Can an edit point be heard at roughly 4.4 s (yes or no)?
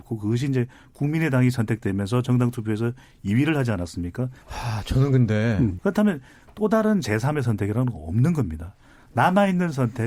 yes